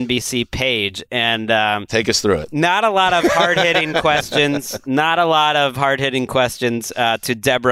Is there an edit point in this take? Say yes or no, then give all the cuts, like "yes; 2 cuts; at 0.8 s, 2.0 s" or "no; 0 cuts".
no; 0 cuts